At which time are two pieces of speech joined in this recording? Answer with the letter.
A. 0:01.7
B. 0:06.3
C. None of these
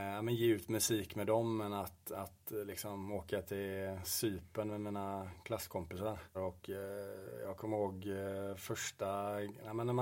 B